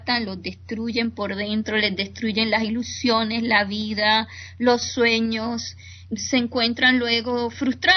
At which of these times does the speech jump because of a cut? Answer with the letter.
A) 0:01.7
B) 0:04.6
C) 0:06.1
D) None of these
C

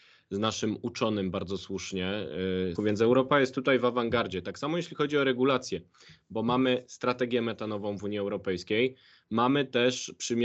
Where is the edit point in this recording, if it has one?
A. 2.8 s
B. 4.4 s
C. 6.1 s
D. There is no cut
A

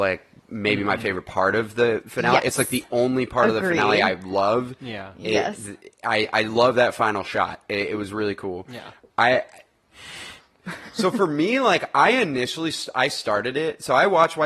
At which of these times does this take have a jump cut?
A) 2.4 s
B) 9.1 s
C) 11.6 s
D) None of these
B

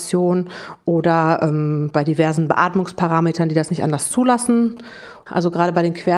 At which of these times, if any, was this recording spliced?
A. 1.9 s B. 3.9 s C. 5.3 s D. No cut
C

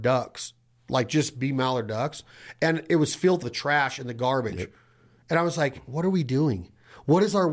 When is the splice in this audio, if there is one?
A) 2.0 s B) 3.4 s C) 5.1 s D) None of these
B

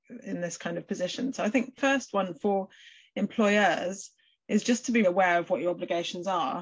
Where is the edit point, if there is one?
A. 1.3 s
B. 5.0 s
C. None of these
B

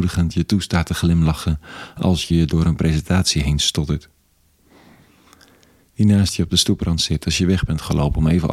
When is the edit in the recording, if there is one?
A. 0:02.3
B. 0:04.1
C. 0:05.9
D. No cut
A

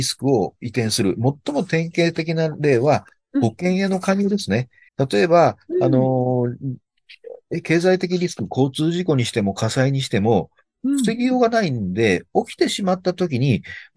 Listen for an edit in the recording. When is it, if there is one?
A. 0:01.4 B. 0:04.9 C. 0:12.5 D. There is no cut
B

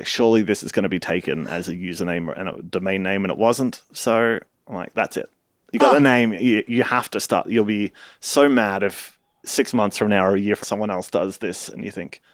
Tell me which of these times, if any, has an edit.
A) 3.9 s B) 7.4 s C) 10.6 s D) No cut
C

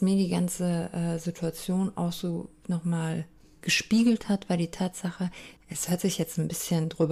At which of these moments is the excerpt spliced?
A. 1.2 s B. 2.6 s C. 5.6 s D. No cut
C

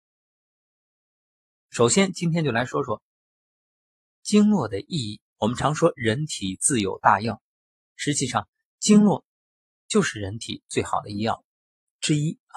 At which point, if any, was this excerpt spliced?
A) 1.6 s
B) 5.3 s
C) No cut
B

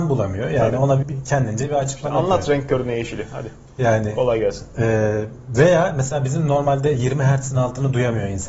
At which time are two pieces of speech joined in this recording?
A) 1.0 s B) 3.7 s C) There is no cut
A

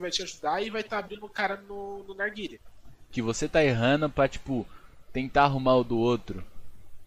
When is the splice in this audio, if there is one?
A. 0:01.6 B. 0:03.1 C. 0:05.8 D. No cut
B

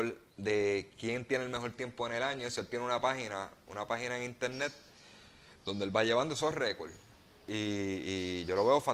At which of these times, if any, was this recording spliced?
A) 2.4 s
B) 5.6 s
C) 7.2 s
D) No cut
D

